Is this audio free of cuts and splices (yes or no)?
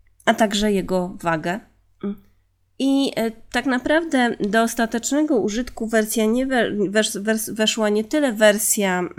yes